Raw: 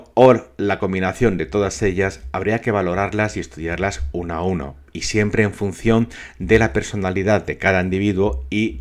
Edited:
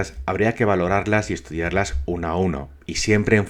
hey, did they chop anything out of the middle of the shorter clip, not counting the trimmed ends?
no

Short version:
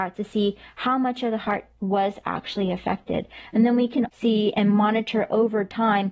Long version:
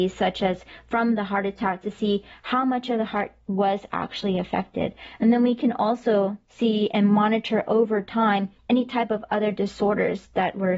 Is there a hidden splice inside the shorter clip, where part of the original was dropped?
yes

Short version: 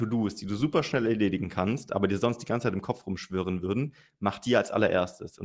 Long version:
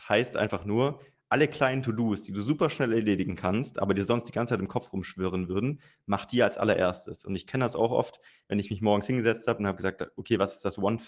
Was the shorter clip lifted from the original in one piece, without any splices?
yes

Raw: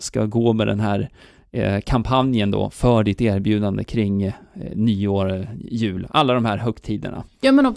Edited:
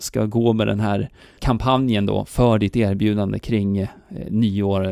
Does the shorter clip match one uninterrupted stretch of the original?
no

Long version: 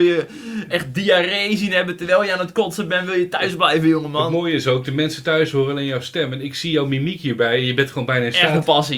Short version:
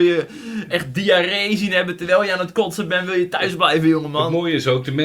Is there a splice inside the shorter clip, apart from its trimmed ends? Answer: no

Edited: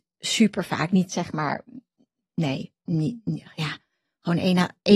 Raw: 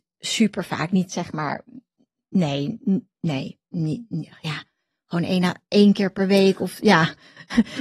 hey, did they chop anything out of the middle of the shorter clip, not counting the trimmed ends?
yes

